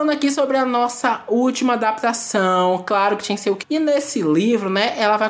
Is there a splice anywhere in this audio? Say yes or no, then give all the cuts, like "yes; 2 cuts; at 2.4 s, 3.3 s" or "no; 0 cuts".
yes; 1 cut; at 3.6 s